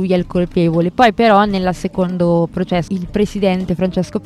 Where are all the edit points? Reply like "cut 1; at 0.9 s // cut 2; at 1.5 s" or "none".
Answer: cut 1; at 2.9 s